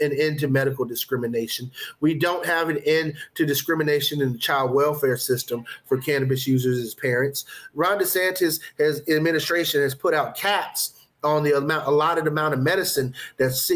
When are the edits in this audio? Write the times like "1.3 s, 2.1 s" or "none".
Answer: none